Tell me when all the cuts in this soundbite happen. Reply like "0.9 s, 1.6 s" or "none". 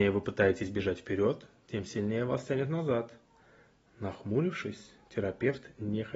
none